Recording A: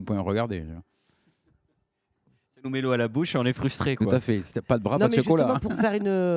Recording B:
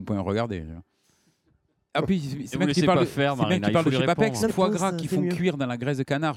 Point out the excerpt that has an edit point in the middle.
B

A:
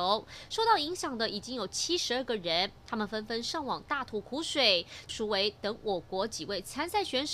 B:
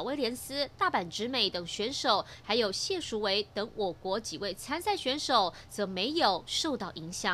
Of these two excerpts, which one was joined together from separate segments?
A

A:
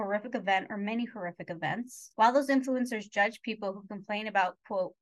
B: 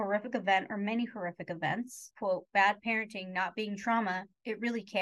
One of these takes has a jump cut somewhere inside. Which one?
B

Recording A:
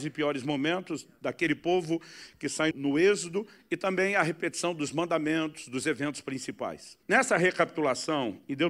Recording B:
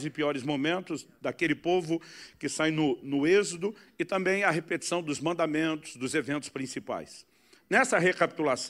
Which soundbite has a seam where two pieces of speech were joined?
A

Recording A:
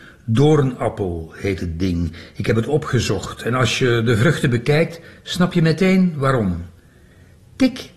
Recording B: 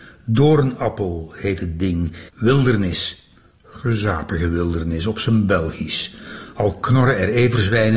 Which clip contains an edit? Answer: B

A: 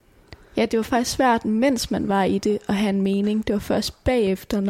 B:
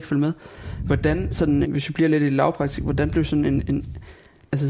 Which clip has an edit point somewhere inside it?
B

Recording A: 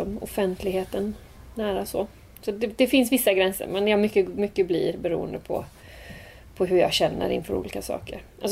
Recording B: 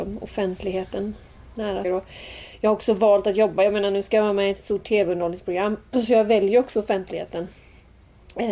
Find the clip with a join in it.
B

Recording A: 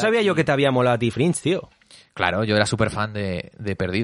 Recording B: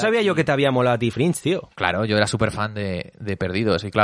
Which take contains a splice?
B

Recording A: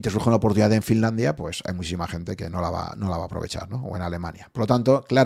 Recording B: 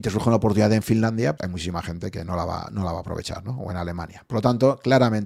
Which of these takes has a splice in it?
B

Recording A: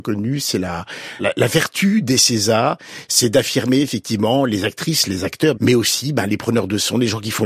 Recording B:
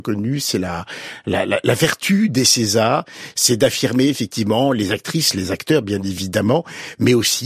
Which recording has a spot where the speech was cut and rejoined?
A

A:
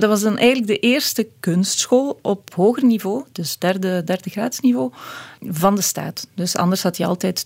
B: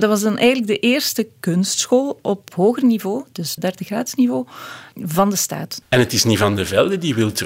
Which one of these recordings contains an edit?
B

